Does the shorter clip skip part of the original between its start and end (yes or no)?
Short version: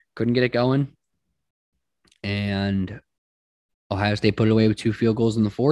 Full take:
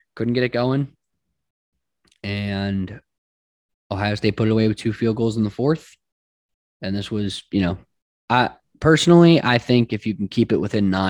no